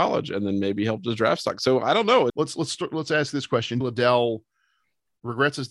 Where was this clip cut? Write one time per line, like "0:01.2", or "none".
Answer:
0:02.3
0:03.8